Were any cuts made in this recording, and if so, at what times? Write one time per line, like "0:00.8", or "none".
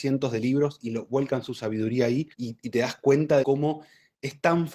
0:02.3
0:03.4